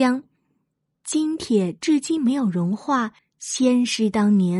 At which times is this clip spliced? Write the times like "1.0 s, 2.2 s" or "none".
3.2 s